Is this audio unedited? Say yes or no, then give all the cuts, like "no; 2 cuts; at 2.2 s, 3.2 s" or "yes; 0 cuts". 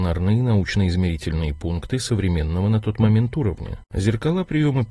no; 1 cut; at 3.8 s